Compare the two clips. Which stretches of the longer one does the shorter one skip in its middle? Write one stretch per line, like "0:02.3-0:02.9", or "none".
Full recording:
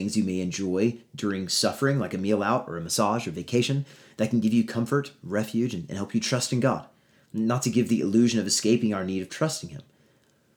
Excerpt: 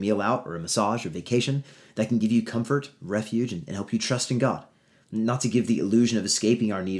none